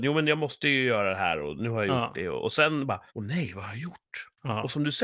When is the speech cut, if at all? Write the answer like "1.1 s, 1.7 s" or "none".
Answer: 3.1 s